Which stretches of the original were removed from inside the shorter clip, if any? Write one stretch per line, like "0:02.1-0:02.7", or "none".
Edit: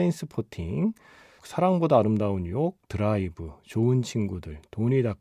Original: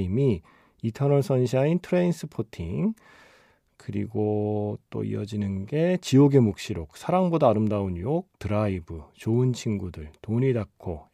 0:03.4-0:06.9